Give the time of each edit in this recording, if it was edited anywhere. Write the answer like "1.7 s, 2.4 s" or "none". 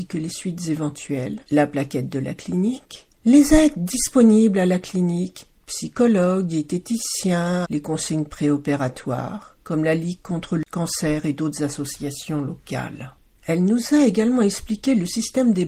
7.6 s, 9.6 s

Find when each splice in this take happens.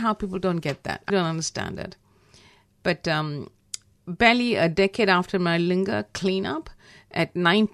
1.1 s

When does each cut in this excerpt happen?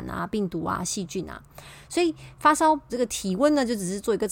2.9 s

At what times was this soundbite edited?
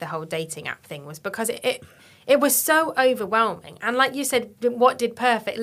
none

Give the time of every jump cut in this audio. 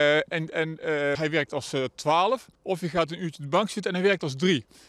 1.2 s, 2.6 s

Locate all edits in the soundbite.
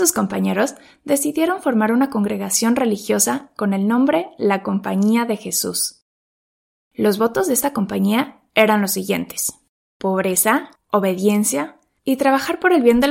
10.8 s

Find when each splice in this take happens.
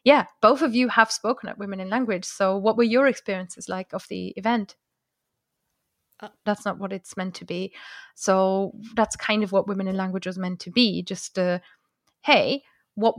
6.5 s

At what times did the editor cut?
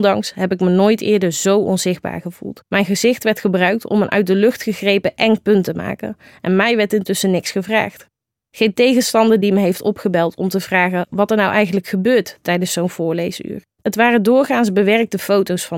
2.7 s, 13.7 s

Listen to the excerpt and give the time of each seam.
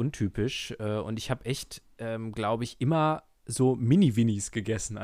none

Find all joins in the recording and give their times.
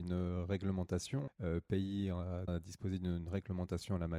1.3 s, 2.5 s

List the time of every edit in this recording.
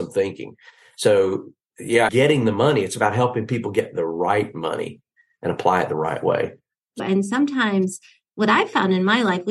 2.1 s, 7.0 s

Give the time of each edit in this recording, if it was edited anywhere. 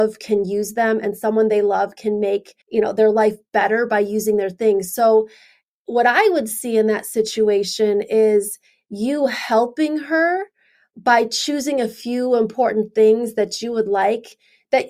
2.6 s

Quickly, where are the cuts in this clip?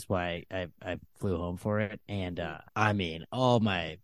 2.7 s

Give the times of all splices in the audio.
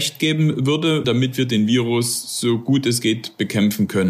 1.0 s

